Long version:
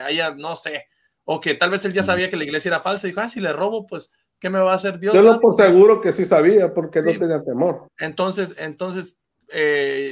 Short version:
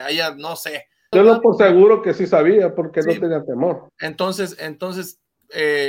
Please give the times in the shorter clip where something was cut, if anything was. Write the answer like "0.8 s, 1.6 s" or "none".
1.1 s